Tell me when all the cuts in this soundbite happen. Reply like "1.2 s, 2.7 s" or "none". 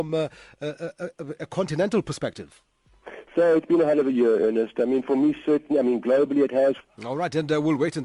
6.8 s